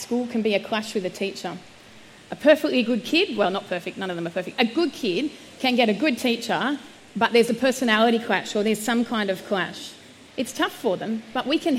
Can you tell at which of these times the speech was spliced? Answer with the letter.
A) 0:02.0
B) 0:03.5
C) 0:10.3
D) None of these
C